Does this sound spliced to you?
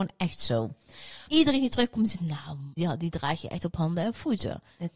yes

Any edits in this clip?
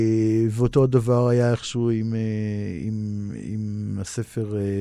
no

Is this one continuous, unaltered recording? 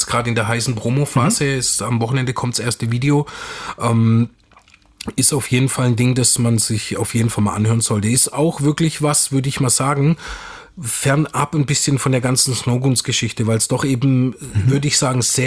yes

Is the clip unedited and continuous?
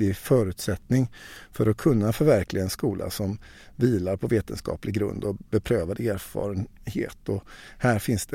yes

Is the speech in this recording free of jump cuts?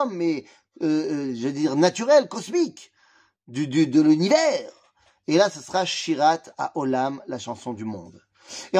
yes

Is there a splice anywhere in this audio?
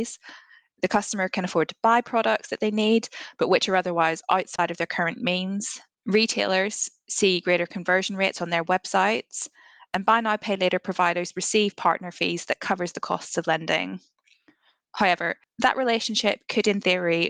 no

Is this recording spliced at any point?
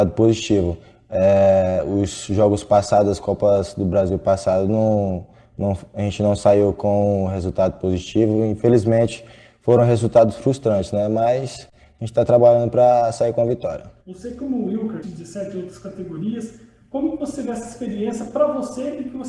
yes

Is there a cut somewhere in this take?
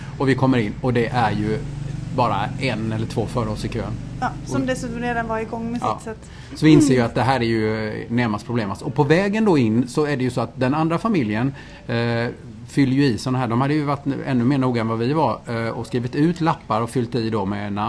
no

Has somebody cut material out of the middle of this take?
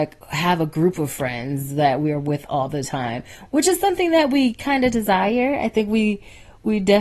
no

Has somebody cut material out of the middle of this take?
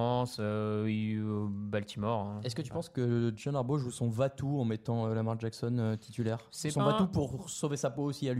no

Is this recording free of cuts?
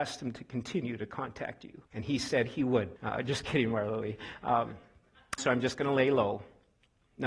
no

